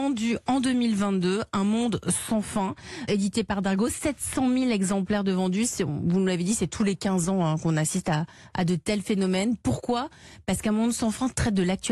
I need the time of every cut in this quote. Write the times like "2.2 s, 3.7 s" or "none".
3.1 s

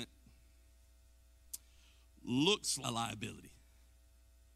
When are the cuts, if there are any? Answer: 2.8 s

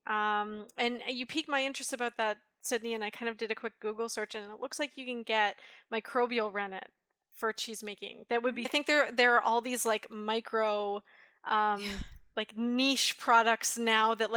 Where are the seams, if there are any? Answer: 8.6 s

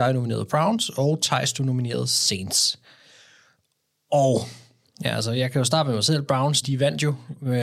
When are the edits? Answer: 6.6 s

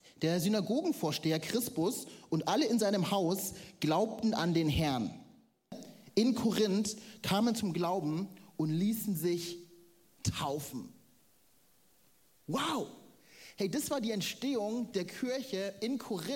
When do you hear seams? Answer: none

